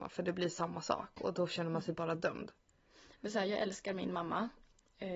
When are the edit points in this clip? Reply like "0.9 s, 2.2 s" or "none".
none